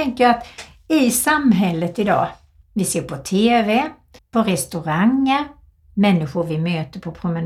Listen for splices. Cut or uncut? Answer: cut